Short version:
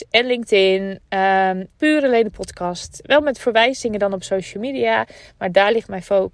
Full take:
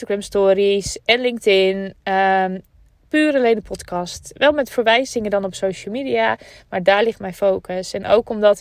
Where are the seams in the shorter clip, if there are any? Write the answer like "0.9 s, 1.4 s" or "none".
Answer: 1.7 s

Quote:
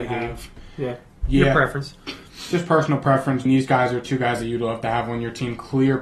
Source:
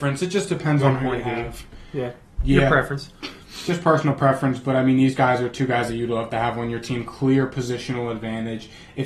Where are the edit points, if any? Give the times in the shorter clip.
3.5 s

